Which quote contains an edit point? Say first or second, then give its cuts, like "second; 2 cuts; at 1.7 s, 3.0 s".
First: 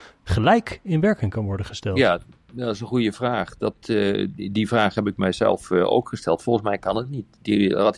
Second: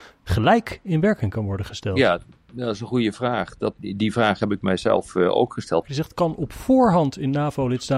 second; 2 cuts; at 3.8 s, 5.8 s